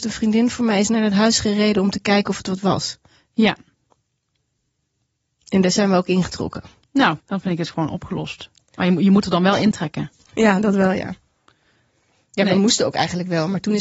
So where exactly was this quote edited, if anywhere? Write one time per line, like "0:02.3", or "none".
0:07.2

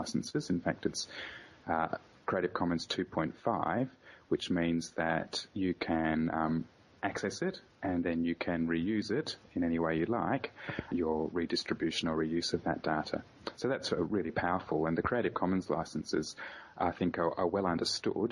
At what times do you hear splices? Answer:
0:10.9

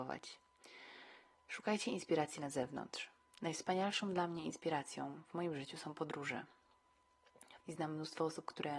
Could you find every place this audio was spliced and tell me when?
0:07.6

